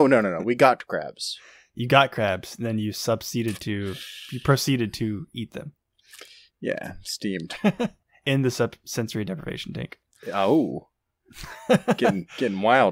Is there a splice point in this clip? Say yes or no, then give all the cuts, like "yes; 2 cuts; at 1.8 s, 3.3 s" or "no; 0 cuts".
no; 0 cuts